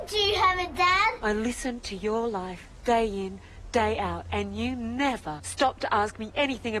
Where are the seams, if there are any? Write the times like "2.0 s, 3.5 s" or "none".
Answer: none